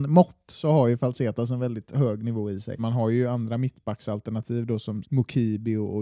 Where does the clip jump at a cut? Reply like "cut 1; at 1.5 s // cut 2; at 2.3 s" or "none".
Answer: cut 1; at 2.8 s // cut 2; at 5.0 s